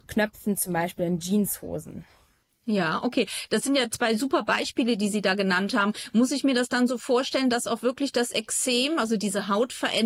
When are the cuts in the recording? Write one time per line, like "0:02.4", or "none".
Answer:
none